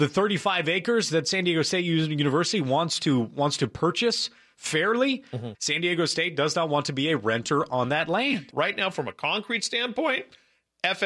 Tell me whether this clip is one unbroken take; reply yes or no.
no